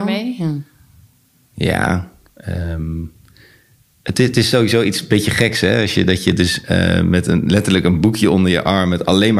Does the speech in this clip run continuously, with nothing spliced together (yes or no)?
yes